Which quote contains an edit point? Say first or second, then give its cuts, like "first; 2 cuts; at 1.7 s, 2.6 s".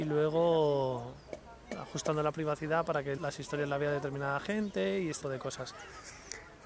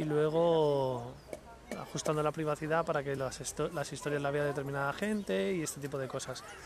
first; 2 cuts; at 3.2 s, 5.2 s